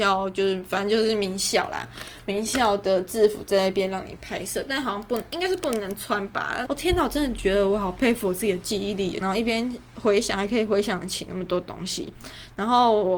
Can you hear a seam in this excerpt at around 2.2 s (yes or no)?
no